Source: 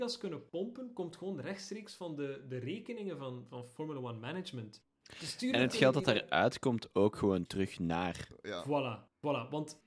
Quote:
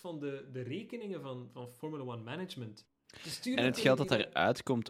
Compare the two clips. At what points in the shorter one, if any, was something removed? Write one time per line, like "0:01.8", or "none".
none